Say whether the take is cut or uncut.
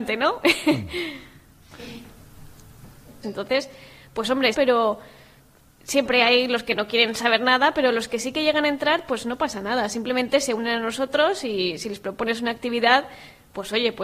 cut